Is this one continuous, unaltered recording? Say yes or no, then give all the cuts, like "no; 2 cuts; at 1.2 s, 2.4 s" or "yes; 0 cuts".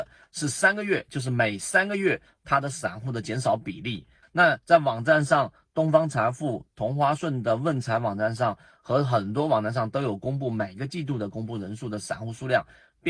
no; 1 cut; at 4.2 s